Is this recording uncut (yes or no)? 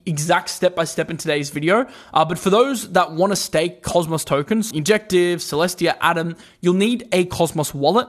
no